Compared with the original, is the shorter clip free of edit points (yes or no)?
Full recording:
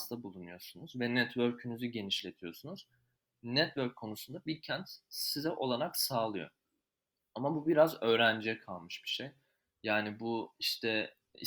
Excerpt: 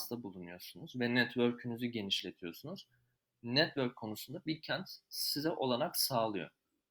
yes